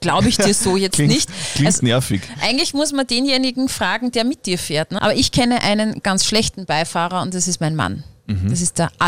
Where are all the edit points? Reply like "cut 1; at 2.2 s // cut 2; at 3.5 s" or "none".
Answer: cut 1; at 5.0 s // cut 2; at 6.0 s